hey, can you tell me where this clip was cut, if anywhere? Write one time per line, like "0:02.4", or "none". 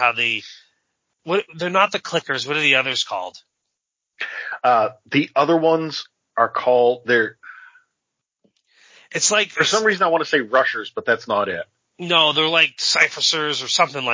none